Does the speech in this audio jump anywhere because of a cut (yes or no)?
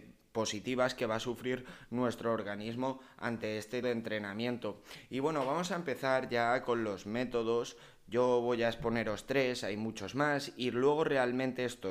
yes